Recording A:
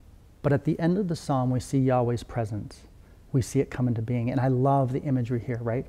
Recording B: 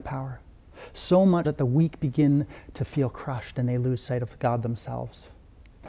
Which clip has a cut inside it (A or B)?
B